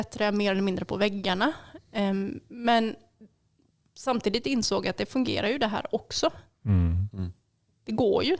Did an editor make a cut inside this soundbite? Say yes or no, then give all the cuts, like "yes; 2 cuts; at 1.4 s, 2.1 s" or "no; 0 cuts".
no; 0 cuts